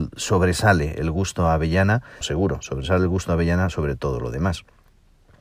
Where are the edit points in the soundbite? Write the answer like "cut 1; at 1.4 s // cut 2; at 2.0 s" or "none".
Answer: cut 1; at 2.2 s